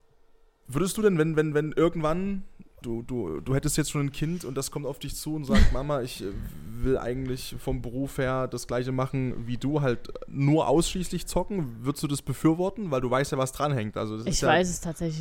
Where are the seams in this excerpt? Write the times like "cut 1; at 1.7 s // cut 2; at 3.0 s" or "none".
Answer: cut 1; at 2.8 s